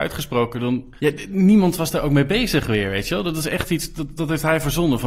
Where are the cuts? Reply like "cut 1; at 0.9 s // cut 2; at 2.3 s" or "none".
cut 1; at 1.0 s

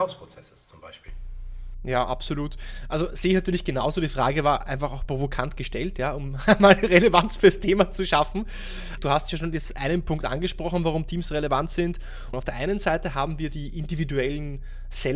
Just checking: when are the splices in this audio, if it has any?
cut 1; at 9.0 s // cut 2; at 12.3 s

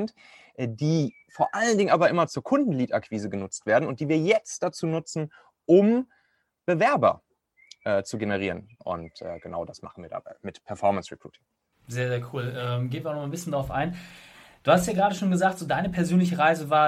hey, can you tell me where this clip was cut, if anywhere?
cut 1; at 8.8 s

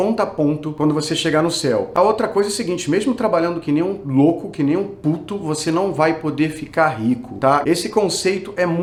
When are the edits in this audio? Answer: cut 1; at 7.6 s

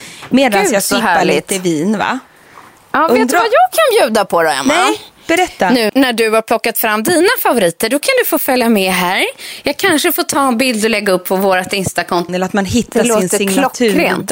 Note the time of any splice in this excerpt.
cut 1; at 5.9 s // cut 2; at 12.3 s

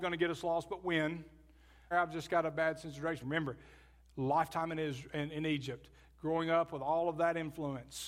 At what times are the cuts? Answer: cut 1; at 1.9 s // cut 2; at 3.2 s

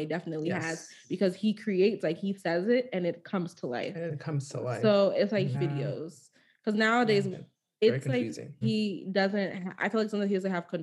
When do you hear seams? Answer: cut 1; at 5.5 s // cut 2; at 7.3 s // cut 3; at 8.6 s

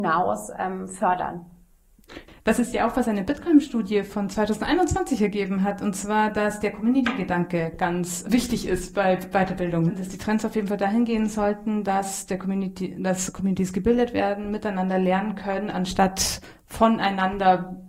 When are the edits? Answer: none

